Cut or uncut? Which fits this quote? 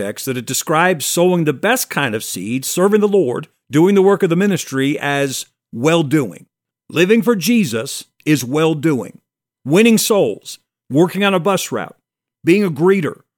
cut